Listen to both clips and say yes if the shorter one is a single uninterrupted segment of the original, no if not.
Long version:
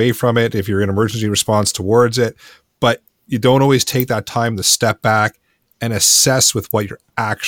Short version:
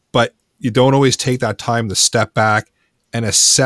yes